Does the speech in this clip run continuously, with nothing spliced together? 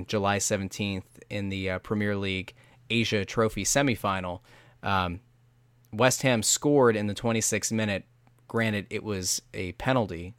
yes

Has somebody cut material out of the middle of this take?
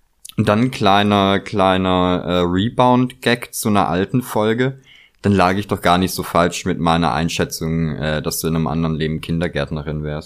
no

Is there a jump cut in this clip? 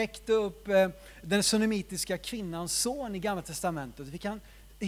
no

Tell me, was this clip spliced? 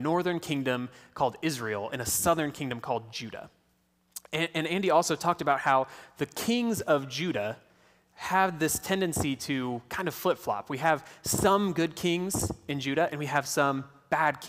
no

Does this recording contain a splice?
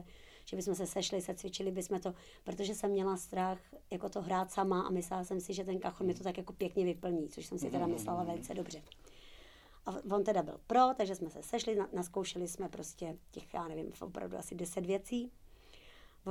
no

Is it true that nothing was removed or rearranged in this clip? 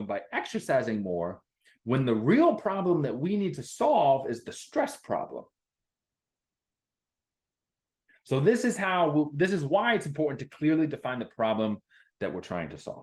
no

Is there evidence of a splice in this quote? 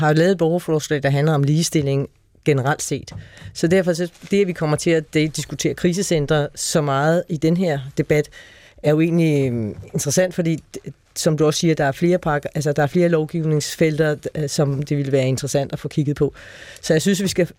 no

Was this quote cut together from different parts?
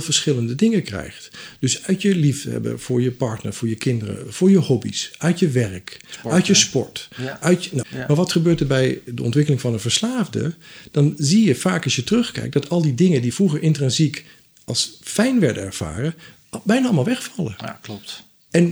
yes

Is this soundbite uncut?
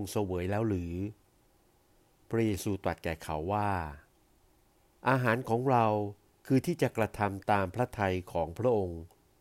yes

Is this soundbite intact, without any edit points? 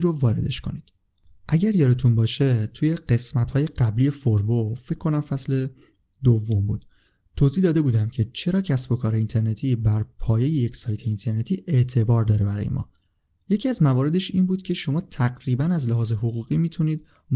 yes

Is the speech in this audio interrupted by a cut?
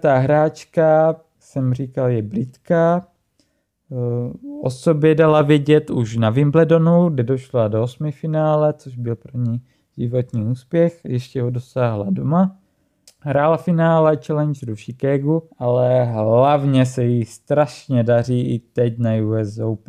yes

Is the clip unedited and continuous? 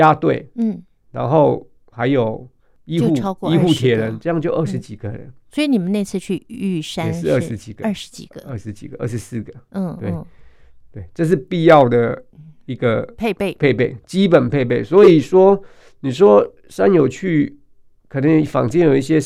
yes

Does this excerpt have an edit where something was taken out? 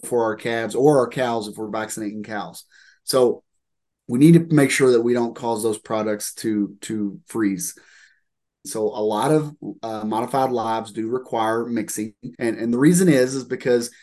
yes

